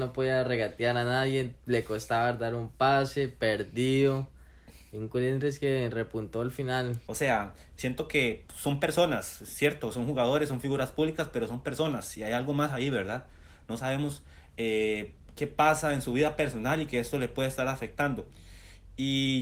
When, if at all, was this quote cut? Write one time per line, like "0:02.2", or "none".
0:07.1